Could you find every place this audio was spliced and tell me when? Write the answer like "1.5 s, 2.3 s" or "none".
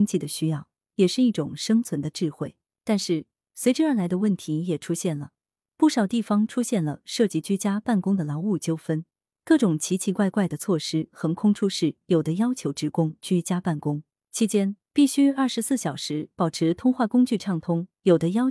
none